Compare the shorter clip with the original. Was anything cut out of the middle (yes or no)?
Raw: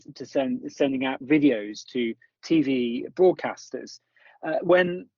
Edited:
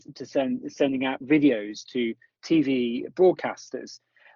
no